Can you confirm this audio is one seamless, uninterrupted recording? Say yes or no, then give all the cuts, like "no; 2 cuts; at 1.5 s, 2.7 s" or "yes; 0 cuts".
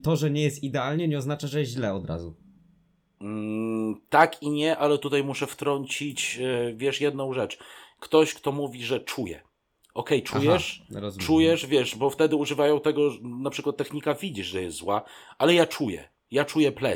yes; 0 cuts